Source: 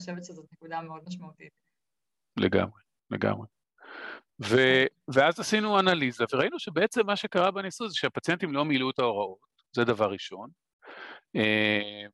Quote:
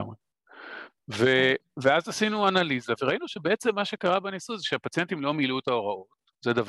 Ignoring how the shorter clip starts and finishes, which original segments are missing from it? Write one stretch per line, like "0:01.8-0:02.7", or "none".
none